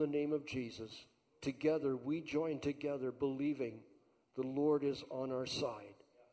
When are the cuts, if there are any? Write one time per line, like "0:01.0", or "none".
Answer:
none